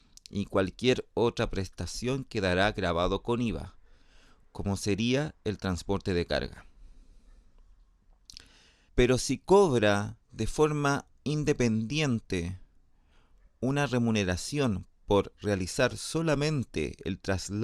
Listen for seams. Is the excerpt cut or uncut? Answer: cut